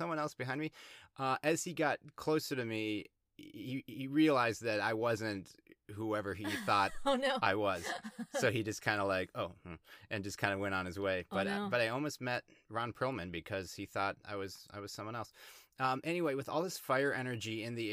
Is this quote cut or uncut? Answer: uncut